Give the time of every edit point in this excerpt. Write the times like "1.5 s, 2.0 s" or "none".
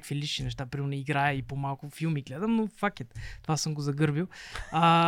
none